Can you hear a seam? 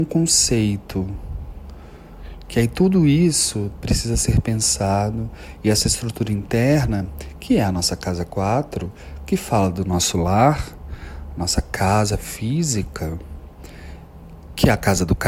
no; 0 cuts

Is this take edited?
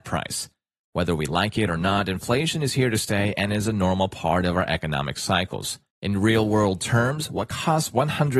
yes; 1 cut; at 5.9 s

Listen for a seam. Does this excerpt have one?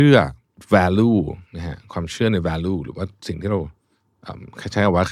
no; 0 cuts

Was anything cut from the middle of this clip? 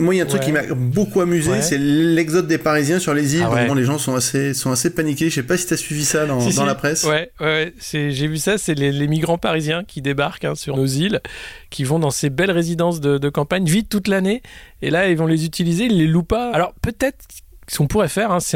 yes; 3 cuts; at 3.7 s, 10.7 s, 16.5 s

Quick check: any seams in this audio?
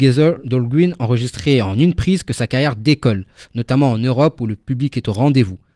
no; 0 cuts

